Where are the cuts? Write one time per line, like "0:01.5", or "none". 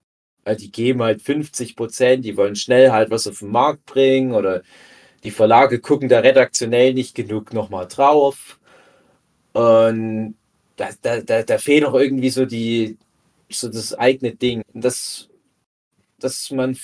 0:13.5
0:14.6